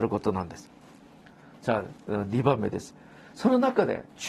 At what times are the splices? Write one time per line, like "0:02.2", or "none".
none